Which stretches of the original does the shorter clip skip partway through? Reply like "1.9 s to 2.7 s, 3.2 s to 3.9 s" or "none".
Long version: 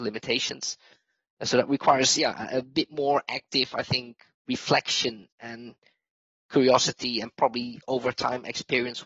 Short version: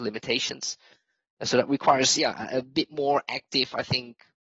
none